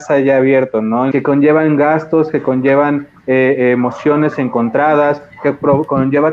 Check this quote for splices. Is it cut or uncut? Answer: cut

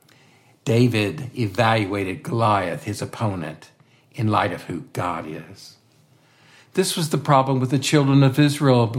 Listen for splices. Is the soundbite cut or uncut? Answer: uncut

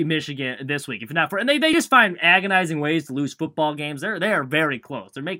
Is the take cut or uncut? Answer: uncut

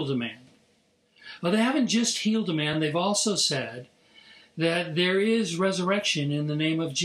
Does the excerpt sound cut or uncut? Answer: uncut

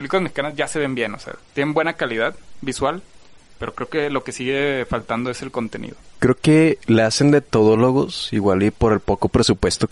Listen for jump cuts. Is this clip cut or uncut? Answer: uncut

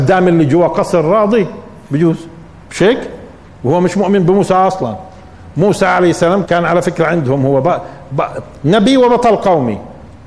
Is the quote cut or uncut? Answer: cut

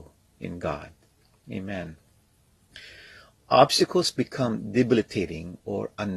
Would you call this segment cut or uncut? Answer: uncut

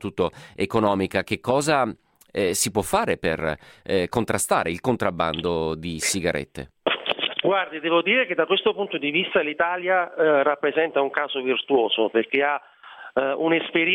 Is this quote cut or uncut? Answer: uncut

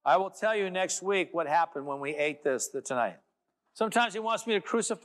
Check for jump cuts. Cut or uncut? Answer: cut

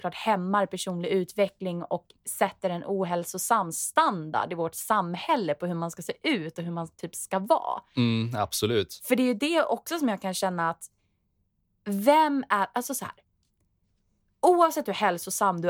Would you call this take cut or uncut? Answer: uncut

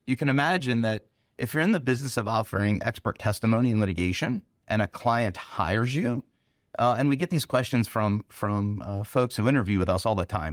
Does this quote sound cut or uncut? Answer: cut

